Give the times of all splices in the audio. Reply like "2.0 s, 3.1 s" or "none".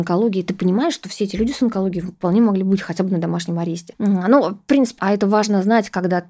3.9 s, 5.0 s